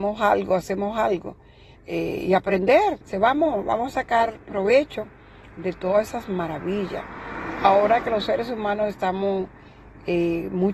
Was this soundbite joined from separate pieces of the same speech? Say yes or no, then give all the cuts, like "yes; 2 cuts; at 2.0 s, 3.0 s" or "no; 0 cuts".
yes; 2 cuts; at 1.8 s, 3.0 s